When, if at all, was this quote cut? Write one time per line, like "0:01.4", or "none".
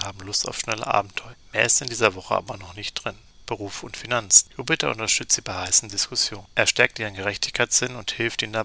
none